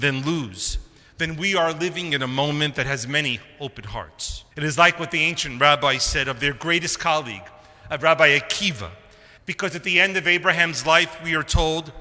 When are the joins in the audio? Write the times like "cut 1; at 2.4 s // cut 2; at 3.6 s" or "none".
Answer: cut 1; at 4.5 s // cut 2; at 9.4 s